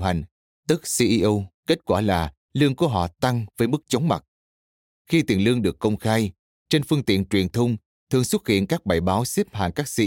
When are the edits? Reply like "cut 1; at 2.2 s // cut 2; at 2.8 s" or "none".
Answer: cut 1; at 1.6 s // cut 2; at 4.9 s